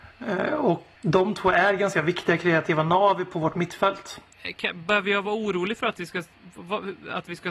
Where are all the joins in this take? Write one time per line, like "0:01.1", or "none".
0:01.0
0:04.3